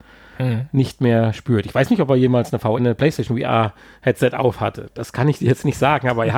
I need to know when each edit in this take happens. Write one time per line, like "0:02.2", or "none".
0:02.8